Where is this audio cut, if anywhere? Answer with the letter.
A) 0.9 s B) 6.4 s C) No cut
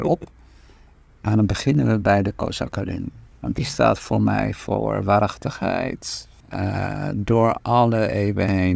B